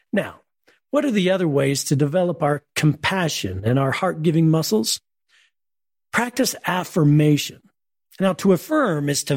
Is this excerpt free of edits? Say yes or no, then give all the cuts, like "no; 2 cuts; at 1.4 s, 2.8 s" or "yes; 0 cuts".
yes; 0 cuts